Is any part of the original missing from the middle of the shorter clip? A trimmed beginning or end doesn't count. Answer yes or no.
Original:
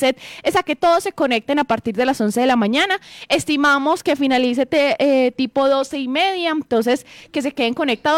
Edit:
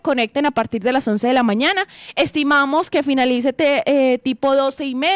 no